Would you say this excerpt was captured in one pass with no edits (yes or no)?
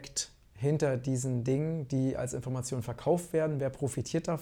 yes